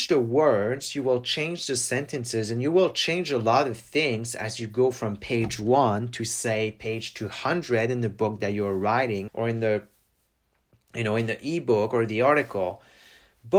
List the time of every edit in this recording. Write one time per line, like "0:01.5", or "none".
0:09.3